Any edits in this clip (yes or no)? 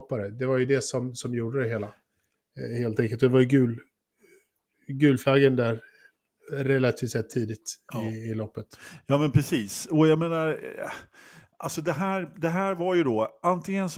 no